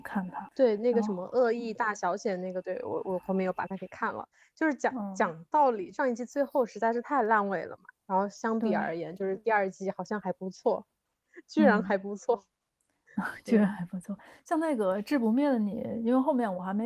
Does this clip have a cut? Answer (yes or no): no